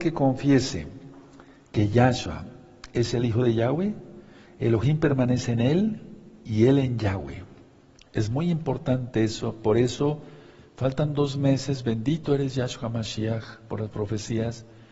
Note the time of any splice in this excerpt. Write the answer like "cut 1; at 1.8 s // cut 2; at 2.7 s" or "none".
none

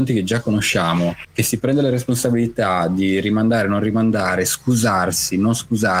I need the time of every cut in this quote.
none

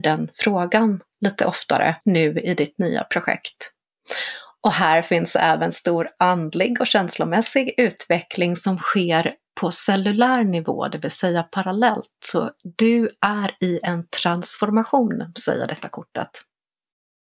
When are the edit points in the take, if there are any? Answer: cut 1; at 2.0 s

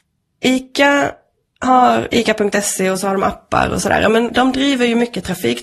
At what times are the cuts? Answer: cut 1; at 4.3 s

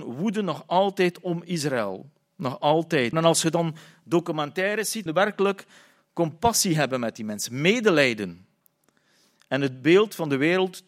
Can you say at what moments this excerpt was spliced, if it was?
cut 1; at 3.1 s // cut 2; at 5.1 s

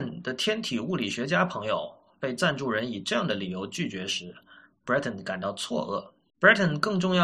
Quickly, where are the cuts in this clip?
cut 1; at 6.3 s

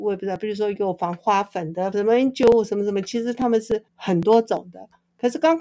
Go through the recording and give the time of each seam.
cut 1; at 1.9 s // cut 2; at 3.9 s

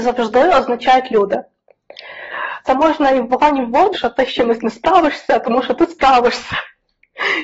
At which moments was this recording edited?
cut 1; at 2.6 s // cut 2; at 3.9 s

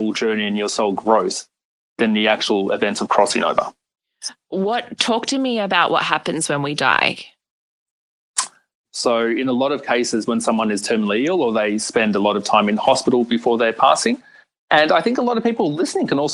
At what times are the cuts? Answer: cut 1; at 8.8 s

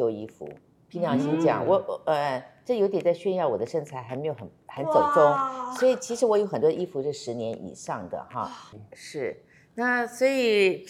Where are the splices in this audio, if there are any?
cut 1; at 8.7 s

